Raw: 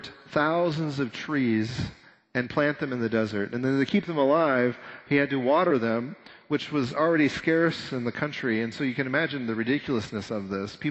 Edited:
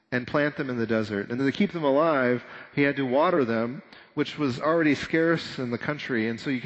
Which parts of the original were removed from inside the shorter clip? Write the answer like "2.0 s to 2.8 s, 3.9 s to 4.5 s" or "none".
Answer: 3.6 s to 3.7 s